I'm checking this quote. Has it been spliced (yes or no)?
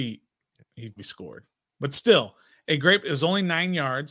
yes